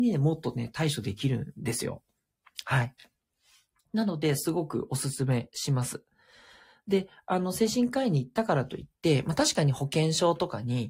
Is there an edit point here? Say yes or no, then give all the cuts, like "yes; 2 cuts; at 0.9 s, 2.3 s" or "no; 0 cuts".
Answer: no; 0 cuts